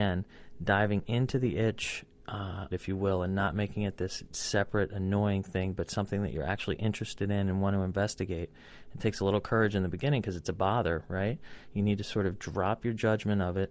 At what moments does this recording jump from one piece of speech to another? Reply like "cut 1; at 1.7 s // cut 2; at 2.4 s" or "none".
cut 1; at 2.7 s